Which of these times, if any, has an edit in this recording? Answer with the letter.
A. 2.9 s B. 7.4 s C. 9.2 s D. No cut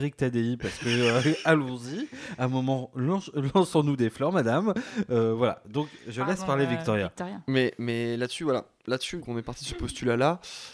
C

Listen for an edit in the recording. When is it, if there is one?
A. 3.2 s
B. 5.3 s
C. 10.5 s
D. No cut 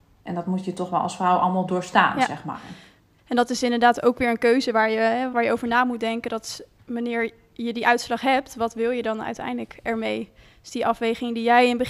B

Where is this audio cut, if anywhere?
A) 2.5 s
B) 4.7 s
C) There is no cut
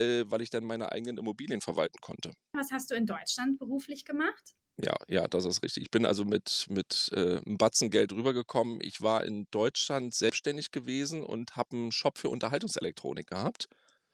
A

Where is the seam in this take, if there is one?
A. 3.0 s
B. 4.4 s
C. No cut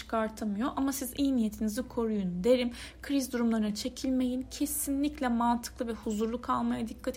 C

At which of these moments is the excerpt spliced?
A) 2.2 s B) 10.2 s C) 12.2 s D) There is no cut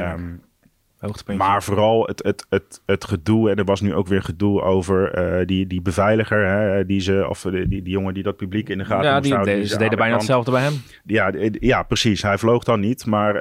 D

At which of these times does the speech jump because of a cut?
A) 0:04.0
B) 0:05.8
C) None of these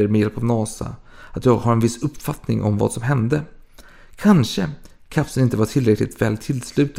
C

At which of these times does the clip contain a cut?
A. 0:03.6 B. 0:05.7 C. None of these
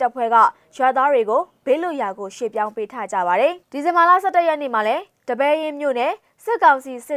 A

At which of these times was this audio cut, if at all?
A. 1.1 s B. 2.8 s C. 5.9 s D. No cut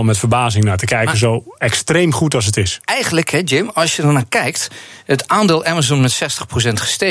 D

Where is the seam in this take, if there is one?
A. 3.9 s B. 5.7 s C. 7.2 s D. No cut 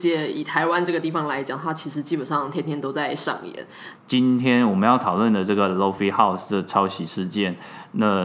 A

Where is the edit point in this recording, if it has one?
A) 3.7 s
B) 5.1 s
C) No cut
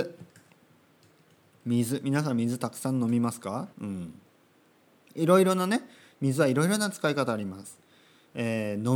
A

